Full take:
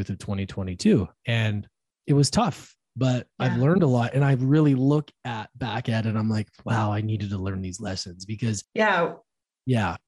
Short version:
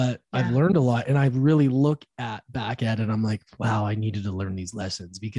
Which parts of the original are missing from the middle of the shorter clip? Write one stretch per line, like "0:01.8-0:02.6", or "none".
none